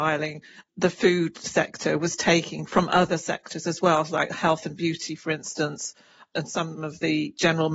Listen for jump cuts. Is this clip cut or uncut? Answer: uncut